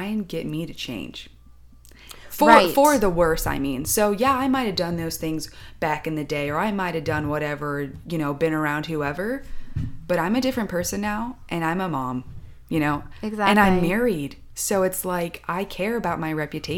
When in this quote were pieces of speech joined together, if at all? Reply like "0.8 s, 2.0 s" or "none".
none